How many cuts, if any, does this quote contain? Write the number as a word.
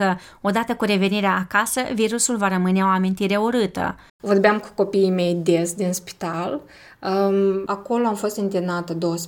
two